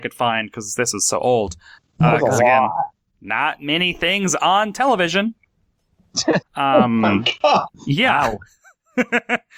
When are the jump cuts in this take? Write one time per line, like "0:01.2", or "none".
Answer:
0:01.8
0:06.4
0:07.7